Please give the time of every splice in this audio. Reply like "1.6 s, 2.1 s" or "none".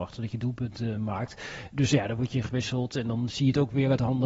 none